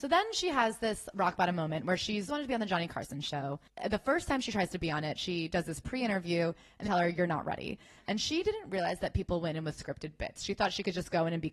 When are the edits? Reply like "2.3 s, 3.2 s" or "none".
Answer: 2.3 s, 6.8 s